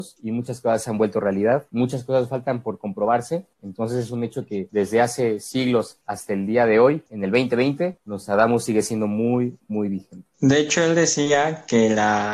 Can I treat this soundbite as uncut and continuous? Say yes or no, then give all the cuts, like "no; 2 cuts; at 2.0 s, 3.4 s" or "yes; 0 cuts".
yes; 0 cuts